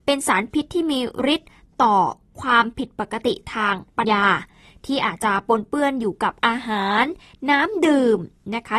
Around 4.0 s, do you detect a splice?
yes; 1 cut; at 4.0 s

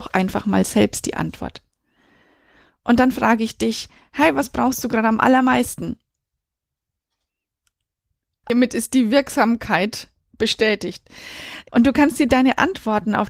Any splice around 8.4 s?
yes; 2 cuts; at 8.4 s, 11.7 s

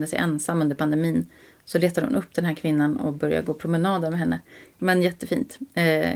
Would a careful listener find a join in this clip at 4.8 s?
yes; 1 cut; at 4.8 s

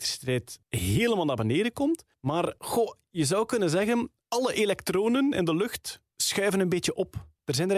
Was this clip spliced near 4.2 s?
yes; 1 cut; at 4.2 s

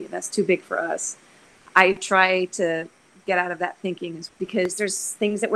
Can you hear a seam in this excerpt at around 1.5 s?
no; 1 cut; at 4.3 s

